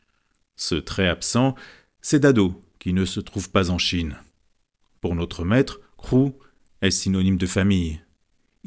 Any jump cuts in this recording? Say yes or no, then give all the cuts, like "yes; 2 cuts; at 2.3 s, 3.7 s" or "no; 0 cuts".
no; 0 cuts